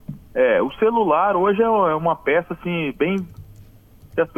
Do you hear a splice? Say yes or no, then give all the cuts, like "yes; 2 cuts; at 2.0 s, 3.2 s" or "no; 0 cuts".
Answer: no; 0 cuts